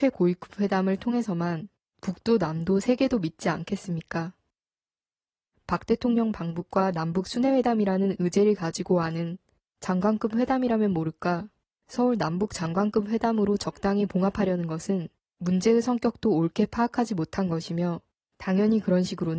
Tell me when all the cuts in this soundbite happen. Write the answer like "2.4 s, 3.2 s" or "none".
none